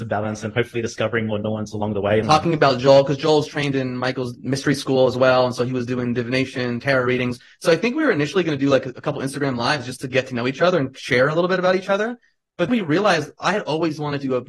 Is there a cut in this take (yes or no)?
yes